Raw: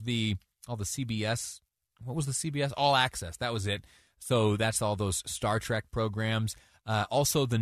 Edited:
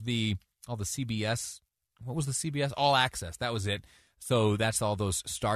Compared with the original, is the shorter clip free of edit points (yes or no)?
yes